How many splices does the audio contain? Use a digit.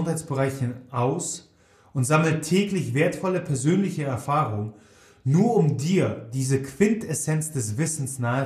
0